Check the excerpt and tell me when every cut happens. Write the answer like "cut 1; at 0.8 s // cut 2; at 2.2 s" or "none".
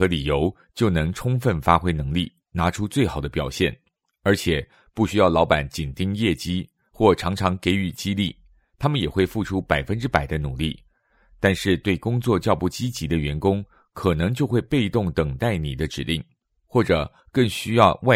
none